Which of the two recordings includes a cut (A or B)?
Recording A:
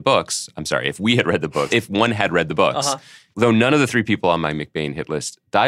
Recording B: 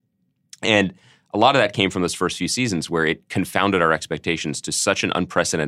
A